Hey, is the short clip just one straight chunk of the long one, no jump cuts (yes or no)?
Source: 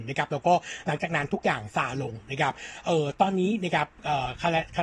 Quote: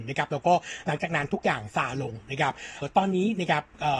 no